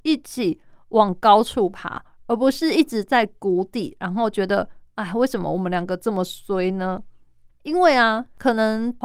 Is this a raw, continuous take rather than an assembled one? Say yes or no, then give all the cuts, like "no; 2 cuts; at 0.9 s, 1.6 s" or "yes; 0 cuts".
no; 1 cut; at 7.5 s